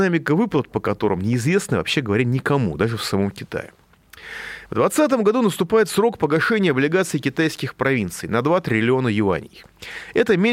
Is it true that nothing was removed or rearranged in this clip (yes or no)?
yes